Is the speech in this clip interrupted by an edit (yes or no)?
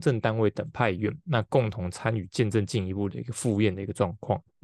no